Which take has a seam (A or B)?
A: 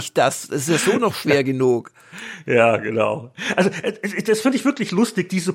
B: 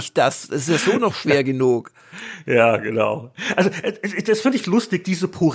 B